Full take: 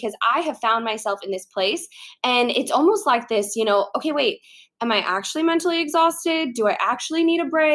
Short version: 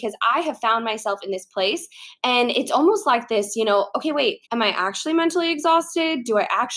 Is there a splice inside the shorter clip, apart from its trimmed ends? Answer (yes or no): yes